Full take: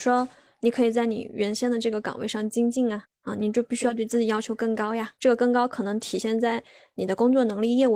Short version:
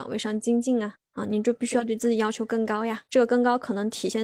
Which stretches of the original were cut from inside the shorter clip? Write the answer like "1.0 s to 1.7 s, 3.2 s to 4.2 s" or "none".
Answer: none